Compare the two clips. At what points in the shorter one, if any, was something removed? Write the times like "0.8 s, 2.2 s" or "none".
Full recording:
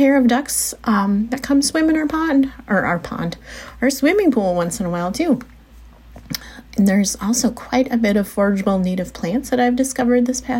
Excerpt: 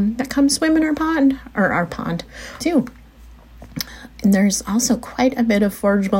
2.6 s